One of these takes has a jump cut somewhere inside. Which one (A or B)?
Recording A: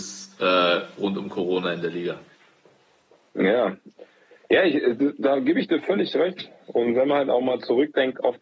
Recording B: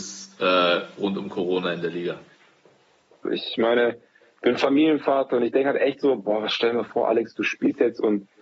B